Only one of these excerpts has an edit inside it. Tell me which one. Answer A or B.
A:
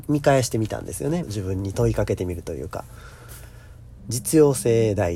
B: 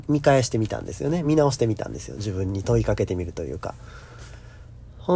A